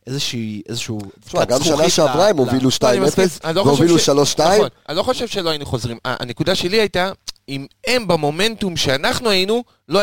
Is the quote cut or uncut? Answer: uncut